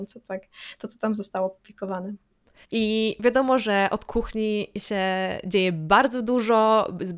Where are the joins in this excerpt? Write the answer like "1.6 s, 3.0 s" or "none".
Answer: 2.6 s

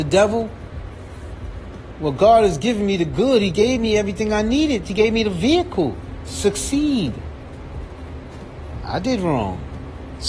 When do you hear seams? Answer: none

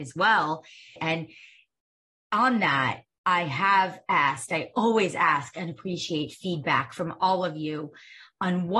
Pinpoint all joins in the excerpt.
1.0 s

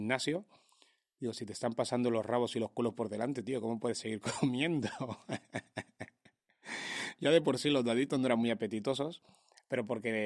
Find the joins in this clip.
none

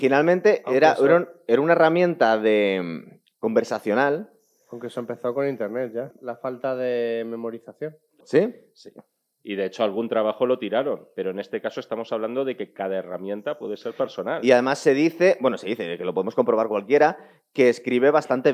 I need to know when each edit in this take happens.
6.1 s, 8.2 s

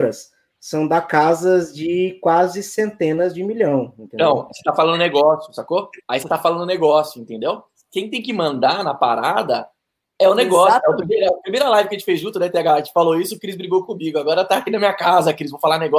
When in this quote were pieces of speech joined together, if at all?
none

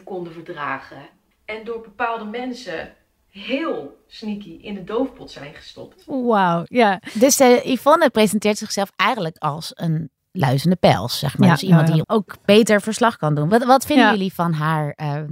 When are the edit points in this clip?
12.0 s

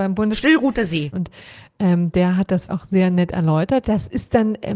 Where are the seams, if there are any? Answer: 1.1 s, 2.7 s, 3.8 s

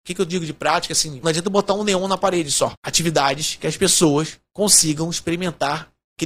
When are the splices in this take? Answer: 1.2 s, 2.7 s

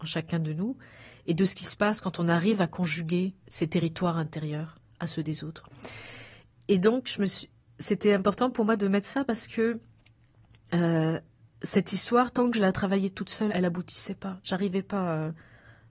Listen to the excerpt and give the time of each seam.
13.5 s

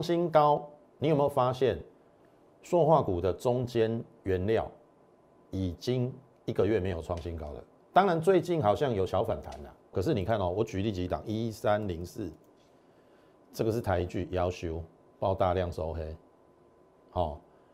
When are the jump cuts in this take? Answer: 9.9 s

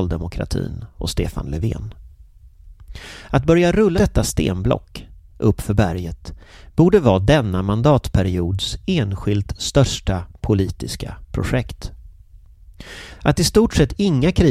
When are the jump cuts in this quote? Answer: 4.0 s, 5.3 s, 13.1 s

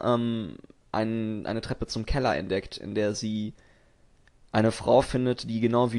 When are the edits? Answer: none

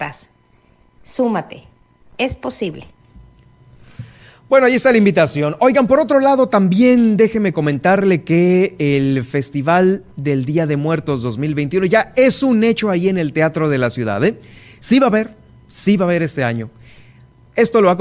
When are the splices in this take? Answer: none

